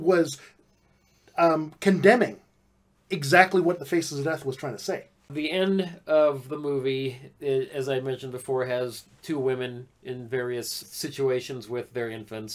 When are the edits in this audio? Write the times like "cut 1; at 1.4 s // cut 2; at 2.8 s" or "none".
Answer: cut 1; at 10.8 s

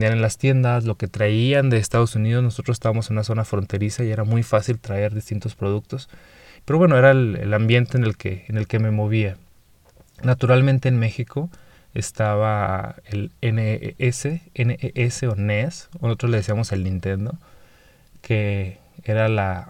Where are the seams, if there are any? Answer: cut 1; at 6.6 s

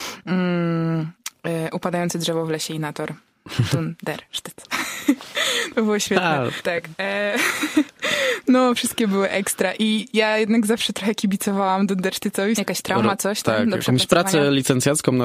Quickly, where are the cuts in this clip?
cut 1; at 6.6 s // cut 2; at 12.6 s

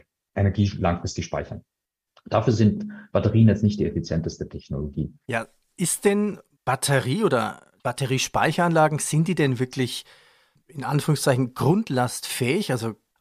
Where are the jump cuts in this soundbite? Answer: cut 1; at 5.2 s

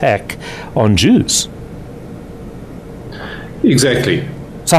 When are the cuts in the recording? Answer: none

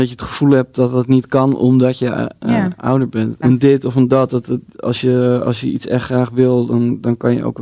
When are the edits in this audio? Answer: cut 1; at 3.4 s

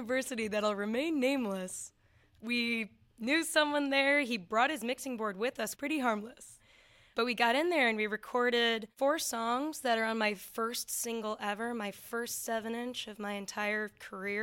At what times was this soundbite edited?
cut 1; at 5.7 s

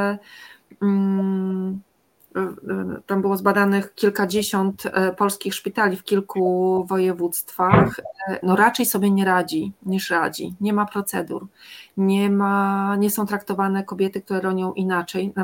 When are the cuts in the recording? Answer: cut 1; at 8.4 s

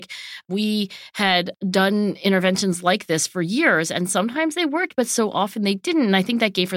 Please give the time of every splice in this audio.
none

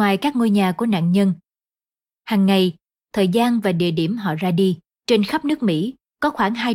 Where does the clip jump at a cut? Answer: cut 1; at 3.0 s // cut 2; at 5.0 s

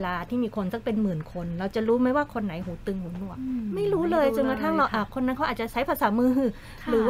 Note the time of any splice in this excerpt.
none

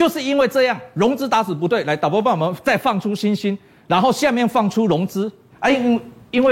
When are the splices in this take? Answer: cut 1; at 5.5 s

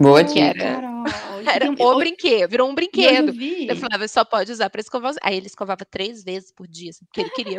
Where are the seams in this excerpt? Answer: cut 1; at 2.5 s

